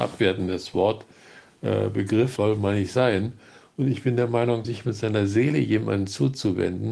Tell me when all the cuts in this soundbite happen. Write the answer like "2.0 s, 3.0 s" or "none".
2.4 s, 4.6 s